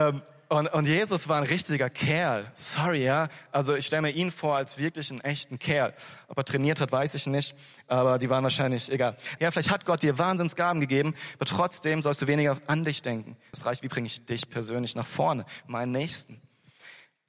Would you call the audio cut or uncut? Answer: cut